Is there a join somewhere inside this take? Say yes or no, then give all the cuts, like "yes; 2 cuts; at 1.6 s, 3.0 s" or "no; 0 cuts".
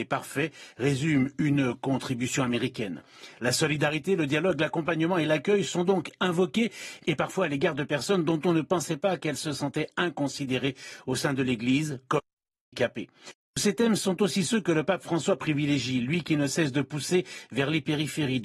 no; 0 cuts